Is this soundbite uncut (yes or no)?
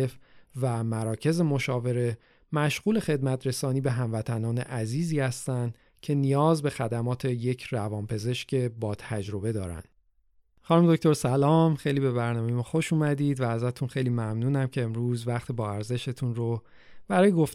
yes